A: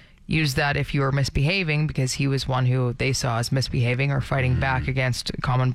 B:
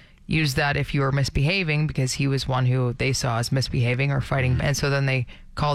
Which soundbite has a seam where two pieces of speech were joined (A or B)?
B